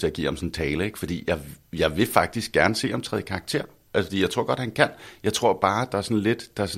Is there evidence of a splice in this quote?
no; 0 cuts

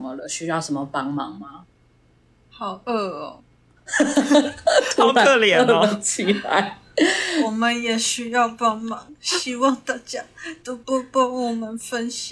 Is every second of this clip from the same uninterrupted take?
yes; 0 cuts

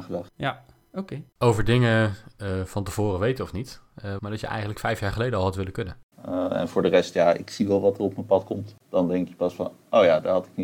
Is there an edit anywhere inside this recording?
yes; 3 cuts; at 4.2 s, 6.1 s, 8.8 s

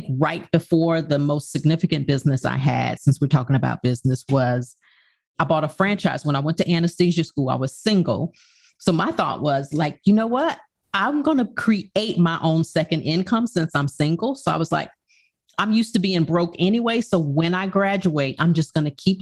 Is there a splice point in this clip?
no; 0 cuts

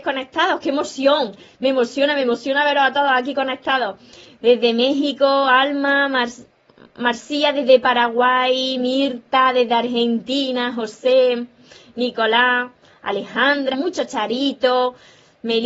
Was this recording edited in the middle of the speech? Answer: yes; 1 cut; at 13.7 s

